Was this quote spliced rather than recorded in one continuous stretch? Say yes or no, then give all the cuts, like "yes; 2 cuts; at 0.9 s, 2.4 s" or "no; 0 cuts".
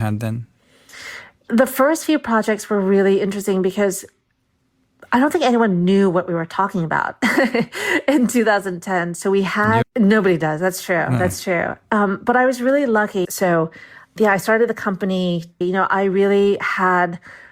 yes; 3 cuts; at 9.8 s, 13.2 s, 15.6 s